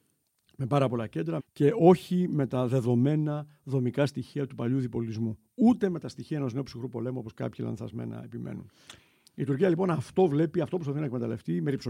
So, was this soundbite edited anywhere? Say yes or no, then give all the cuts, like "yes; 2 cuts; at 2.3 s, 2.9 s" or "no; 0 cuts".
yes; 1 cut; at 1.4 s